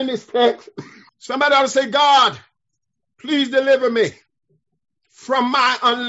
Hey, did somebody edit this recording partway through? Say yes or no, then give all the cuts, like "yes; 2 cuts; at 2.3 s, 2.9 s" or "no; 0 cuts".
yes; 1 cut; at 1.1 s